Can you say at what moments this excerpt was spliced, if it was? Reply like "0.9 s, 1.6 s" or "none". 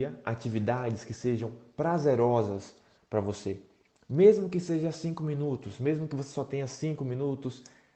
none